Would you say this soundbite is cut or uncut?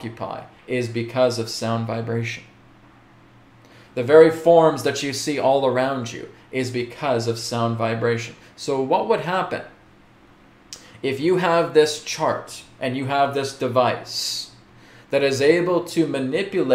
uncut